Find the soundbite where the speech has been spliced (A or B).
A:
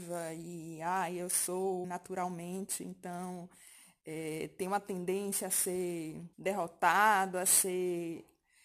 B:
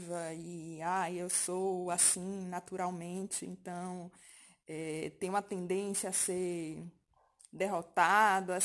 A